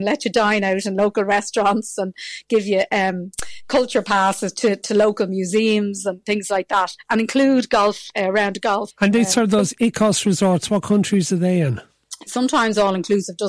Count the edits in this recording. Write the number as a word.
two